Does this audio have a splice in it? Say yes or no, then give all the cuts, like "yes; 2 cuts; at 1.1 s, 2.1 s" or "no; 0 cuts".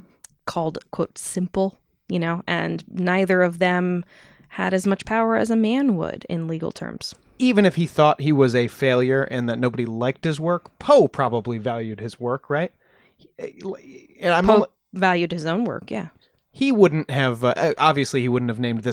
no; 0 cuts